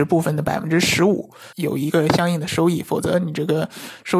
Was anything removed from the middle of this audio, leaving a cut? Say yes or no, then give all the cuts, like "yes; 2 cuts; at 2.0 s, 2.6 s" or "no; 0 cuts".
yes; 1 cut; at 1.5 s